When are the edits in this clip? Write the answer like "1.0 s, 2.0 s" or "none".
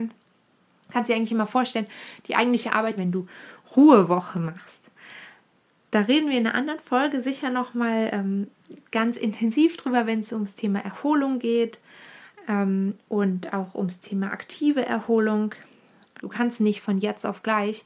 3.0 s, 16.2 s

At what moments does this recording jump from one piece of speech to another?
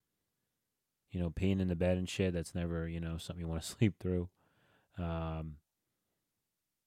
1.0 s

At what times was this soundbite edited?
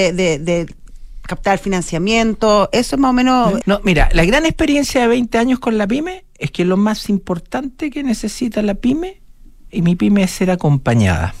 3.6 s

